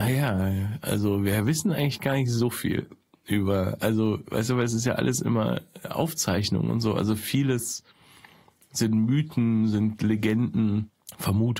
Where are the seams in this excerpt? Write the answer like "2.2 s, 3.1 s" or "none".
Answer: none

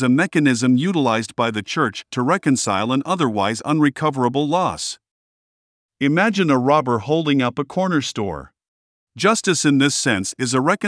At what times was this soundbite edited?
9.1 s

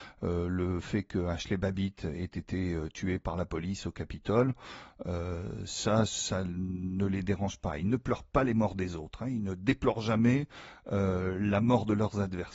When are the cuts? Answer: none

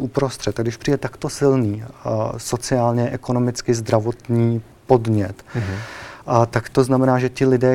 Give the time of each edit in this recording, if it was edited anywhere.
none

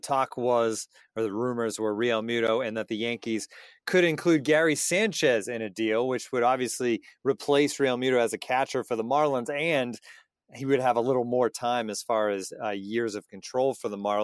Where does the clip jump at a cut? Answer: none

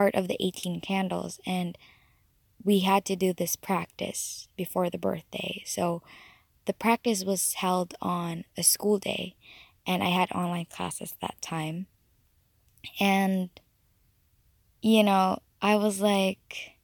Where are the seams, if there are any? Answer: none

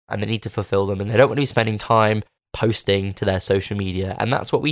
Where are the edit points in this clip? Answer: none

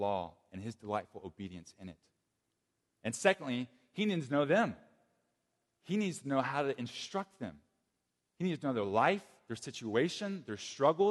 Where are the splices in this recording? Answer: none

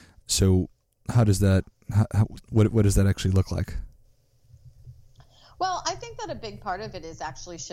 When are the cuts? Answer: none

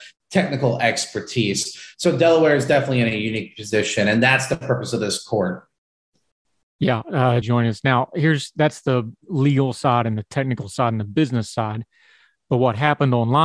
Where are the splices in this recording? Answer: 7.4 s

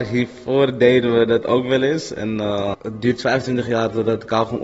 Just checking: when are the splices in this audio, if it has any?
2.7 s

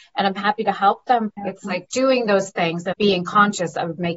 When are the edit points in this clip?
1.3 s, 2.9 s

